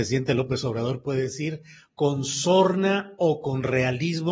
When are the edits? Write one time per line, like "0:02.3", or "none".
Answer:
none